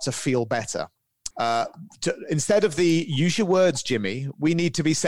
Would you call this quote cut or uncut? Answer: cut